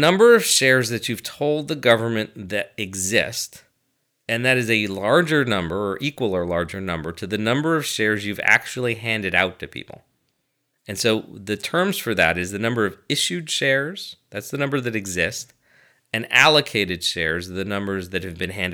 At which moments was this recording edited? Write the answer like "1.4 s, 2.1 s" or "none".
none